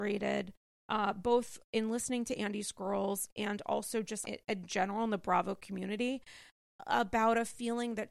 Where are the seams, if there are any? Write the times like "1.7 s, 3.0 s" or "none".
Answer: 4.2 s